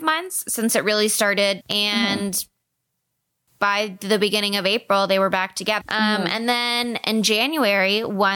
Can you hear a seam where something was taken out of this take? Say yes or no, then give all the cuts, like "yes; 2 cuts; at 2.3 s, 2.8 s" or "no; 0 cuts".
yes; 2 cuts; at 1.6 s, 5.8 s